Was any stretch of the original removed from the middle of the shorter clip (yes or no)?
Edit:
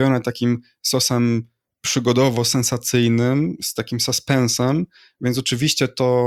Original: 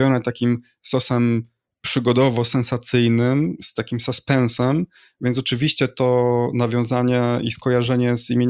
no